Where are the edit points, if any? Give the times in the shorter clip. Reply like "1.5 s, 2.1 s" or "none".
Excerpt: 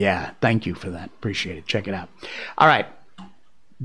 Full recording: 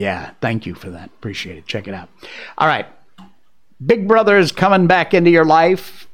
none